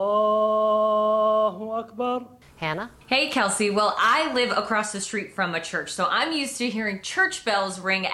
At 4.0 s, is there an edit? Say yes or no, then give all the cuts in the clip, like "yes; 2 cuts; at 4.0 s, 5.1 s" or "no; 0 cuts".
no; 1 cut; at 2.4 s